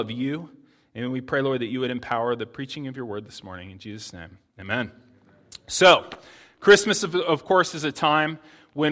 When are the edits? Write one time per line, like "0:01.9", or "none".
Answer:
none